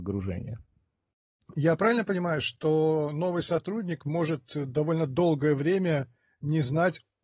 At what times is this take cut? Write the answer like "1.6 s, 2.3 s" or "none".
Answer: none